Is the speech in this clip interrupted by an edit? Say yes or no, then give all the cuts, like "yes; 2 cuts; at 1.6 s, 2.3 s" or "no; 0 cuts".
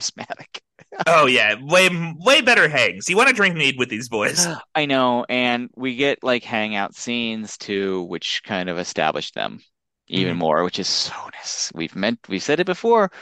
no; 0 cuts